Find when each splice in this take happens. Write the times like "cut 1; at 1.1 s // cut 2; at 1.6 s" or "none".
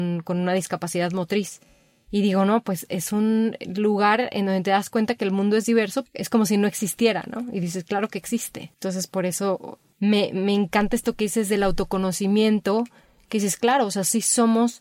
cut 1; at 6.0 s